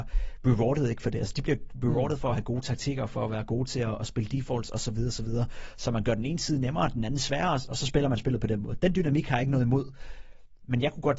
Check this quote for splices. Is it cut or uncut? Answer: uncut